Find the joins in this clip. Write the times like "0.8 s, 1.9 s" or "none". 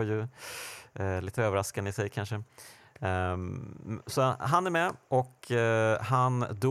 none

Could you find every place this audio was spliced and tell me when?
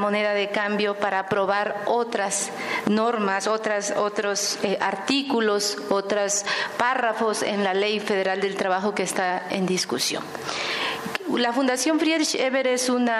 none

